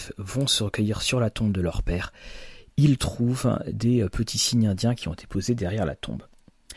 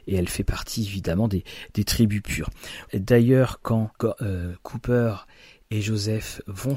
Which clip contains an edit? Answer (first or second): second